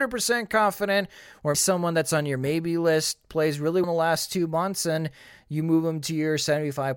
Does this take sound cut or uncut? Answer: cut